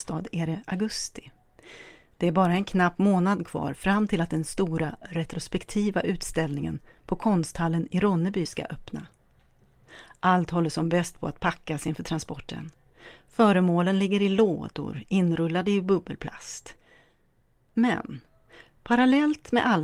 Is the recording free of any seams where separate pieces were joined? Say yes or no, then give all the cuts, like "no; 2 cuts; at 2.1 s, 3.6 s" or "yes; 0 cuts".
yes; 0 cuts